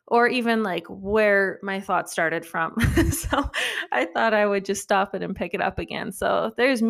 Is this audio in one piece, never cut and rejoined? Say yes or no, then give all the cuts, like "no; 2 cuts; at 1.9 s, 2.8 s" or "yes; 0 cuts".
yes; 0 cuts